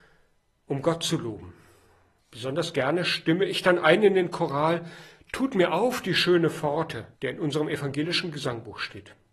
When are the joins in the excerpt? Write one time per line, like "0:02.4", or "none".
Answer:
0:02.2
0:07.1